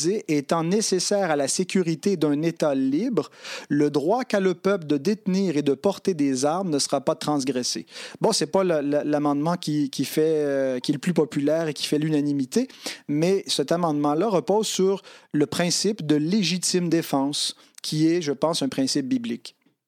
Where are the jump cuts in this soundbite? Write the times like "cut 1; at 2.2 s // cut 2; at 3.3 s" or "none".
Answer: none